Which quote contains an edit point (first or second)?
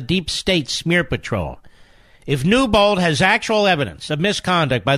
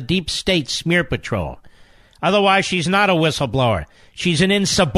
second